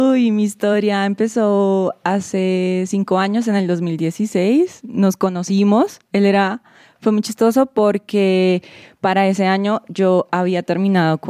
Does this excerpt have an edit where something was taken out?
no; 0 cuts

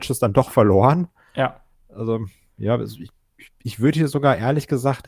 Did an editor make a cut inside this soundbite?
no; 0 cuts

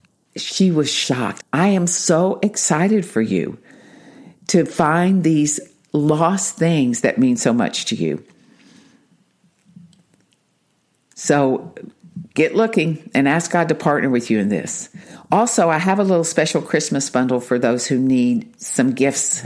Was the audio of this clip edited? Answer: yes; 1 cut; at 1.4 s

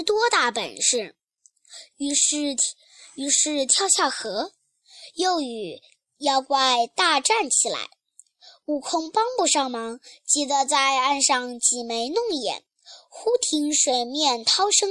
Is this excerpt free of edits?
yes; 0 cuts

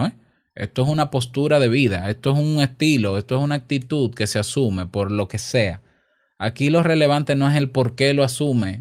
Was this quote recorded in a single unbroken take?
yes; 0 cuts

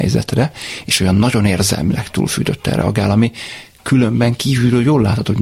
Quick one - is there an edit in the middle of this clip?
no; 0 cuts

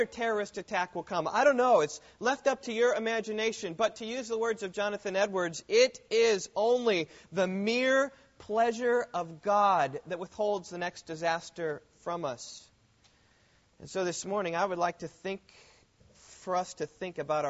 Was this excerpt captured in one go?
yes; 0 cuts

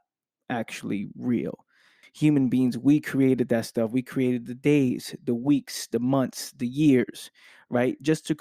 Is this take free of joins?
no; 1 cut; at 2.0 s

